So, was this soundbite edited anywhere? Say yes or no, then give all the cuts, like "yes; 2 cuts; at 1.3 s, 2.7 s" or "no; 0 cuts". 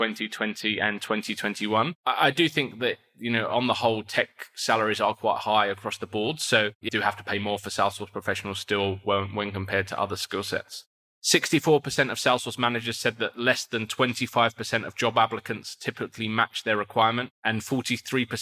yes; 1 cut; at 6.9 s